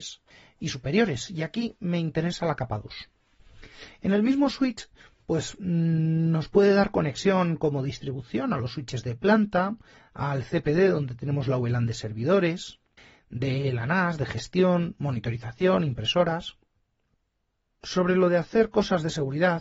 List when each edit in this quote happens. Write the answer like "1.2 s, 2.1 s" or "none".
none